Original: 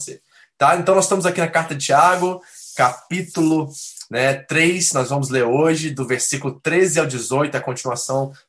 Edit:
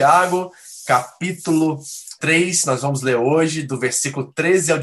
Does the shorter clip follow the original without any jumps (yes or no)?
no